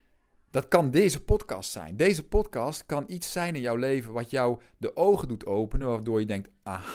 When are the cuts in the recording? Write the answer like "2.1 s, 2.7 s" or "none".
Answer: none